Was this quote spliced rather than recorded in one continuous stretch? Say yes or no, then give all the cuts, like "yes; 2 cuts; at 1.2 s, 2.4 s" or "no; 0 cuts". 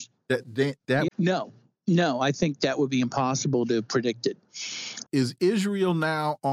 yes; 2 cuts; at 1.1 s, 5.1 s